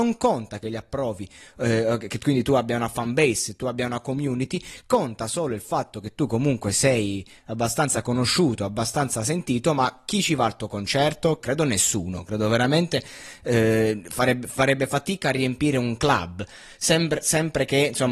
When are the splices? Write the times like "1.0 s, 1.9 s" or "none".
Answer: 11.4 s